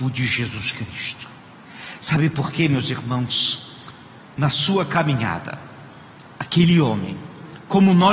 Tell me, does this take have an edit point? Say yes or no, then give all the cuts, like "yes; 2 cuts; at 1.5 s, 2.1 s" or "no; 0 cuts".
no; 0 cuts